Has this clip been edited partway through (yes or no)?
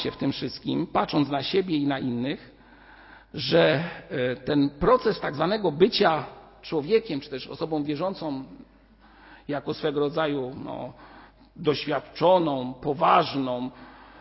no